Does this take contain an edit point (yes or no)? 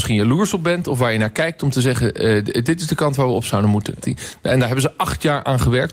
yes